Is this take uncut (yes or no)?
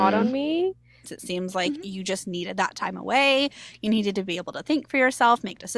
no